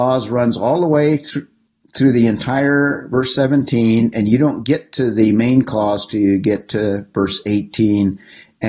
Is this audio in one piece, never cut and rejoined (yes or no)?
yes